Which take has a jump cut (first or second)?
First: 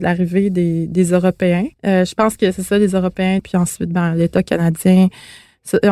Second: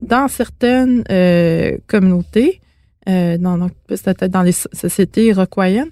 first